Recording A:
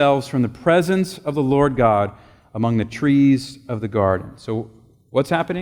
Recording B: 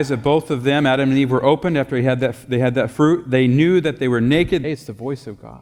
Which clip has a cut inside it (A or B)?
B